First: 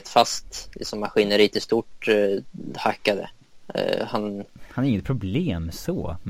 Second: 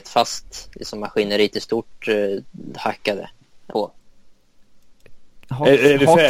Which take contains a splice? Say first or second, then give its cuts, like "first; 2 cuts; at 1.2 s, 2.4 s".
second; 1 cut; at 3.7 s